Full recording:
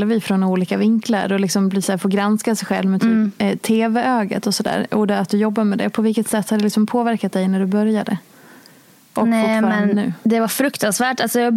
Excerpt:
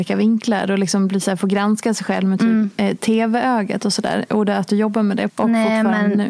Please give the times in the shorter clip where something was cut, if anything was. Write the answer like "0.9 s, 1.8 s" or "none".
5.3 s